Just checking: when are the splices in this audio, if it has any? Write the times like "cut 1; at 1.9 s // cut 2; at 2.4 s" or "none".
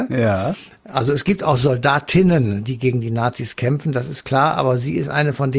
none

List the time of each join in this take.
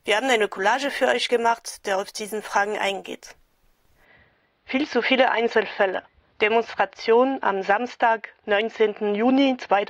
cut 1; at 6.3 s

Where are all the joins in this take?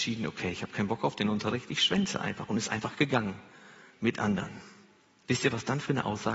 none

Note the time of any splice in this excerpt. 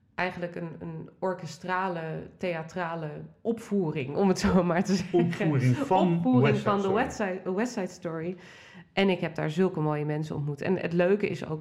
none

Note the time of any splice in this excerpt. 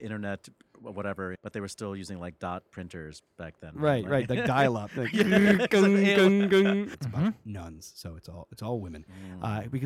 cut 1; at 1.3 s // cut 2; at 6.9 s

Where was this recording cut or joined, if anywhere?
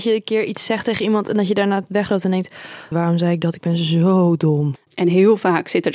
cut 1; at 2.9 s // cut 2; at 4.8 s

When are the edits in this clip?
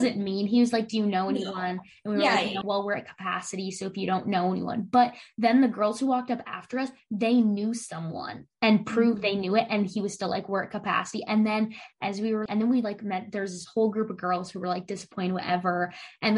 cut 1; at 2.6 s // cut 2; at 12.5 s

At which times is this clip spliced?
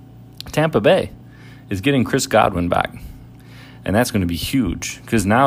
none

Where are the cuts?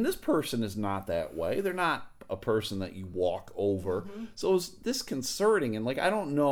none

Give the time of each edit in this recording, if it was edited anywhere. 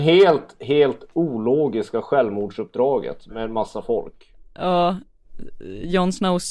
none

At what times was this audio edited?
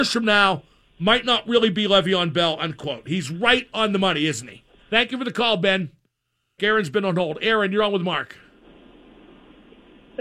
cut 1; at 4.8 s // cut 2; at 6.6 s

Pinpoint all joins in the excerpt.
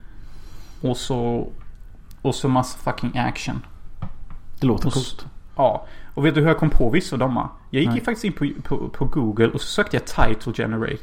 cut 1; at 5.5 s

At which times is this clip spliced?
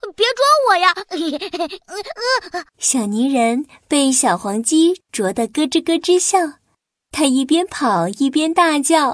cut 1; at 2.7 s

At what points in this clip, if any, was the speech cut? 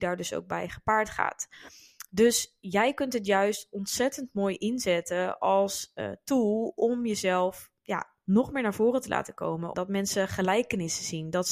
cut 1; at 9.7 s

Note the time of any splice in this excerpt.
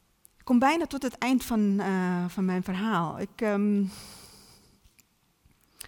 none

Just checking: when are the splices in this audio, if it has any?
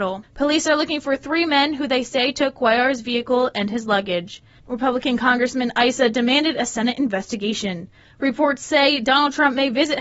cut 1; at 4.6 s // cut 2; at 8.0 s

